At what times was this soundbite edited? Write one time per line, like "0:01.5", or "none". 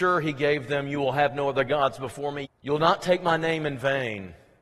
0:02.4

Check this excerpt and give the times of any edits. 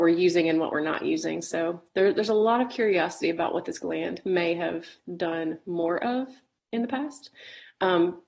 none

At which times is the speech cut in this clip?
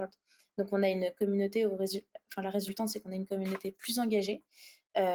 none

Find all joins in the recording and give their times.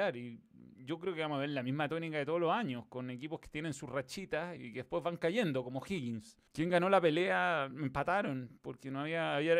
0:04.6
0:06.5

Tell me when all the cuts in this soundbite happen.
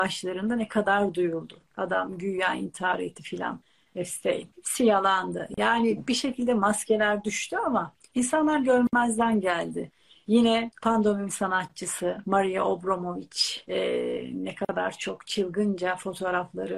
none

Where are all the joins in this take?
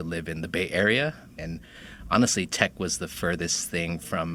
0:01.4

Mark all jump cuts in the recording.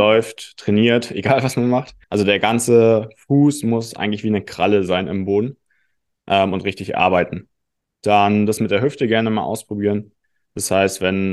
0:02.0

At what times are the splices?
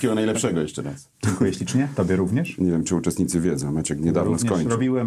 none

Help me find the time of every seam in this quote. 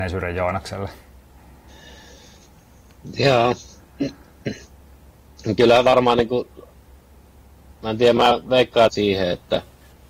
0:08.9

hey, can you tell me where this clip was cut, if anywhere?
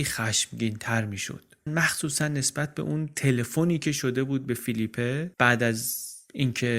0:01.7
0:05.3

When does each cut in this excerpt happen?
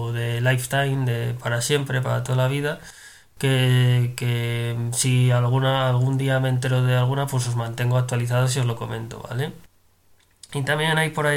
none

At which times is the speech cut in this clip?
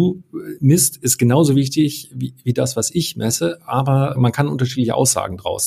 none

